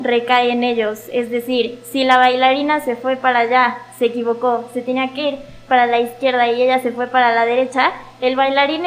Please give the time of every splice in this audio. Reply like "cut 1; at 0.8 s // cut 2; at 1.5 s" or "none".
none

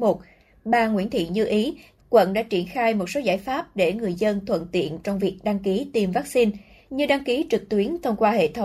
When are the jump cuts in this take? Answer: cut 1; at 2.0 s

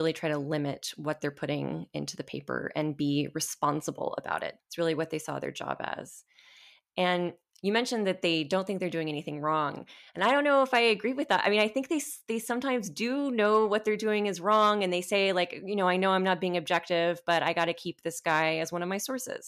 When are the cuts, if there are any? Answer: cut 1; at 4.6 s

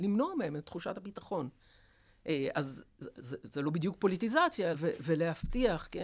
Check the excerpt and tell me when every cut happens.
cut 1; at 3.4 s // cut 2; at 4.7 s

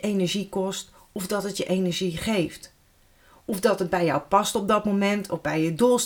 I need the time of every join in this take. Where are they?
none

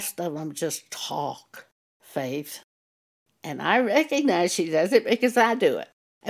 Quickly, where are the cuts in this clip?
cut 1; at 3.3 s

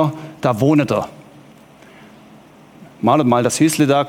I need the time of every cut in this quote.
none

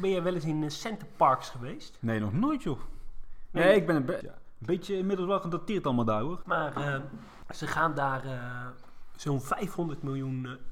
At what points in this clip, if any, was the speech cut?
cut 1; at 4.2 s // cut 2; at 6.4 s

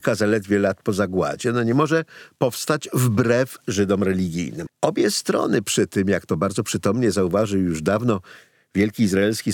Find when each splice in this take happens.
cut 1; at 4.7 s

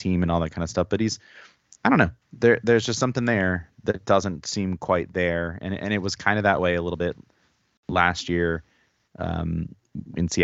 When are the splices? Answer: none

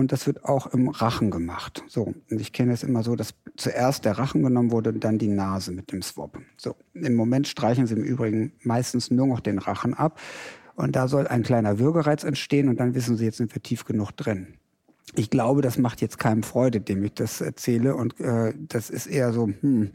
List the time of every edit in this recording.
none

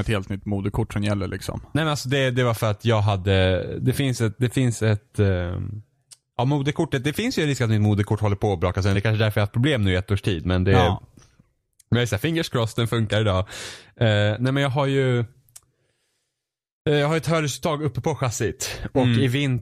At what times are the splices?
none

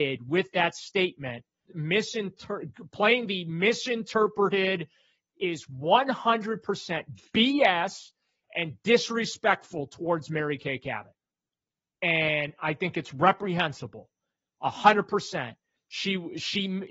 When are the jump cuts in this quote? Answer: cut 1; at 1.7 s // cut 2; at 5.3 s // cut 3; at 15.8 s

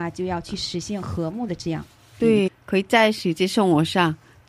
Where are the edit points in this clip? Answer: cut 1; at 2.5 s

